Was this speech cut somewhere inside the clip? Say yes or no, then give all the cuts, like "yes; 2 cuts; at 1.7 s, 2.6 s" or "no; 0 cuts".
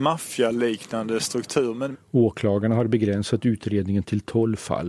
yes; 1 cut; at 1.9 s